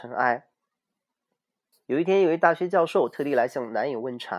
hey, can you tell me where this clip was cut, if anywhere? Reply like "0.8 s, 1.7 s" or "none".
1.7 s